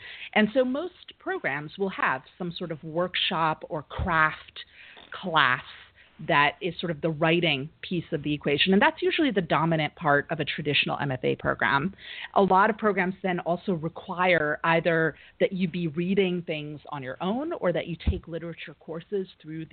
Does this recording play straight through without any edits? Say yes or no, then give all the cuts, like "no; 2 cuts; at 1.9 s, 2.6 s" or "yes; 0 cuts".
yes; 0 cuts